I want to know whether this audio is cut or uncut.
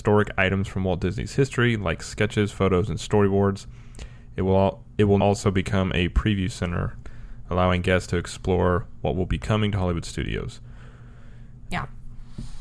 cut